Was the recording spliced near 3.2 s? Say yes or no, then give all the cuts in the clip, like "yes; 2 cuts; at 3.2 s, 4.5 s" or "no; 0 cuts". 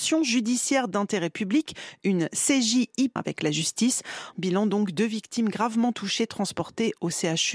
yes; 2 cuts; at 3.2 s, 4.3 s